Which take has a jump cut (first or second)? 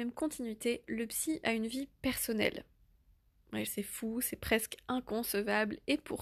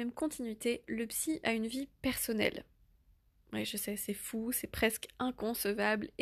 first